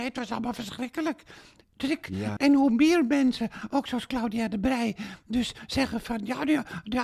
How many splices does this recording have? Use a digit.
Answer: 1